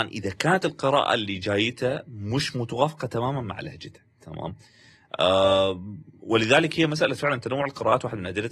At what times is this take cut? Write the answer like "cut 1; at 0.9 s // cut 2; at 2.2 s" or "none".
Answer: cut 1; at 4.1 s